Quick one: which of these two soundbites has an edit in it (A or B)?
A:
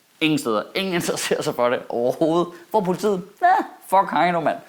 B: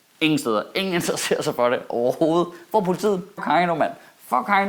B